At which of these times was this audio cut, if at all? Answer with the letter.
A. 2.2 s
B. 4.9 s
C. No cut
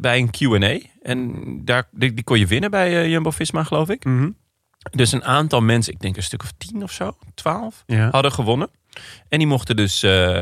C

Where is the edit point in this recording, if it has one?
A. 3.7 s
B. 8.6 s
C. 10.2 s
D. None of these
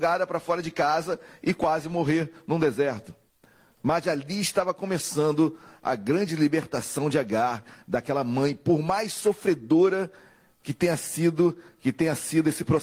D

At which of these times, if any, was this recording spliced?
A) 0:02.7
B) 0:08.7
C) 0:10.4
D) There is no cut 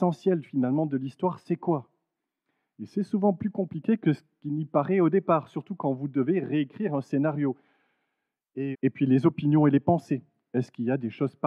B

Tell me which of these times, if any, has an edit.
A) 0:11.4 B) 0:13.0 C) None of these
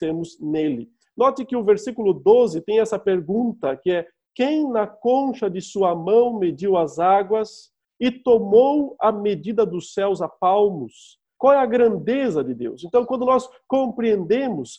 A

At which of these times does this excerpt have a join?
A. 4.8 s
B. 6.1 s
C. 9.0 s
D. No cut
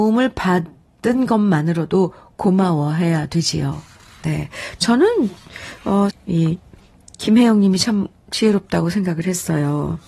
B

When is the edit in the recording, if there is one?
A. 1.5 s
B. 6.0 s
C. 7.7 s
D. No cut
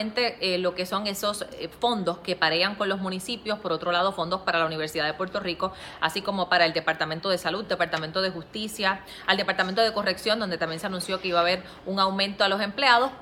D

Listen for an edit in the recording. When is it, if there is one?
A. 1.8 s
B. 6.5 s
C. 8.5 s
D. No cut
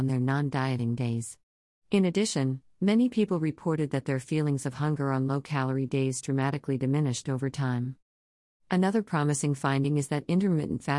C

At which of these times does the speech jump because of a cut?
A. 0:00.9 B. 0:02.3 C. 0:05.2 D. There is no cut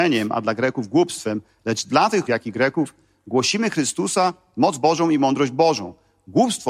B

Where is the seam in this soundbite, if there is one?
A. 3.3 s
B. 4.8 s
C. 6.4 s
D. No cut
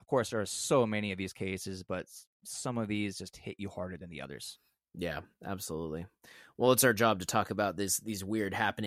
D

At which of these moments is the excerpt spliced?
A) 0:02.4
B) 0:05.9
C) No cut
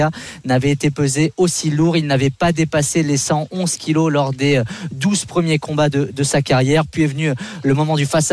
C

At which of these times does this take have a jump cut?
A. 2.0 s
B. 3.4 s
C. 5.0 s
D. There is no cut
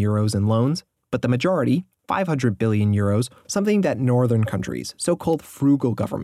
B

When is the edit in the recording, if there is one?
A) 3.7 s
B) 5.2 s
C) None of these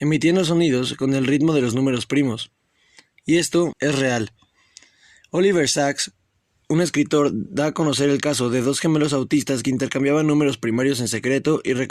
A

